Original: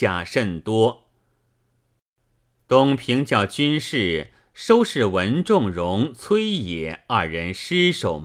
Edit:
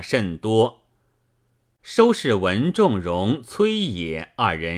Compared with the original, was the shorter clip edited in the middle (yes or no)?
yes